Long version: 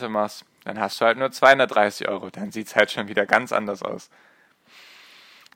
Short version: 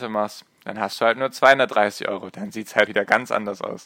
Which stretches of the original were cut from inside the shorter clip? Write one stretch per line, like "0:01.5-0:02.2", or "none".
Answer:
0:02.9-0:03.1